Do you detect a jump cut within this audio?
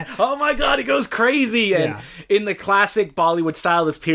no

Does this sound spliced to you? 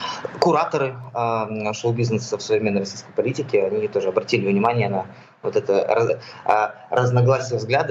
no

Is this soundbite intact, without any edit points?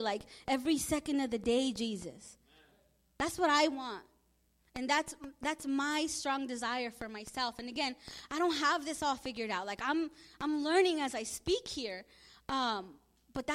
yes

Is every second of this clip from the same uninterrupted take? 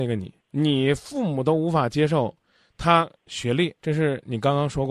no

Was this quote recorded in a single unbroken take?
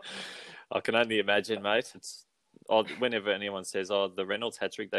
no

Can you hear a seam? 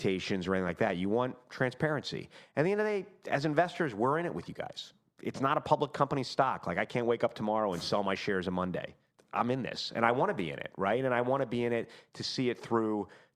no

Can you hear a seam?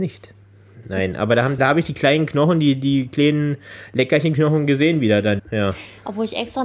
yes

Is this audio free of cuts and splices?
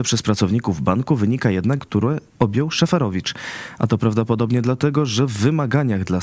no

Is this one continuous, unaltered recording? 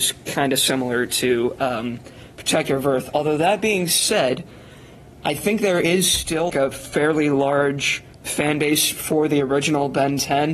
no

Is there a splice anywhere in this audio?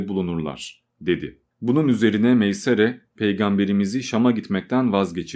no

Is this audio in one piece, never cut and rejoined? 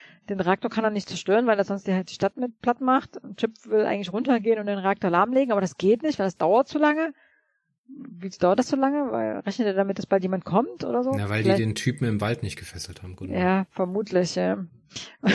yes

